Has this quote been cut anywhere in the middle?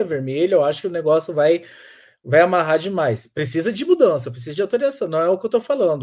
no; 0 cuts

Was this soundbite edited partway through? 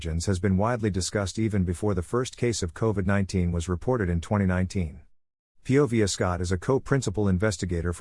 yes; 1 cut; at 5.5 s

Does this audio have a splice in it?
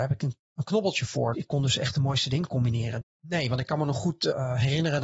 yes; 2 cuts; at 1.3 s, 3.0 s

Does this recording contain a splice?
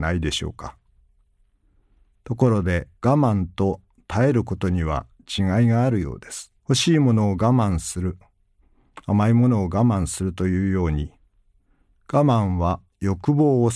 yes; 2 cuts; at 3.0 s, 6.6 s

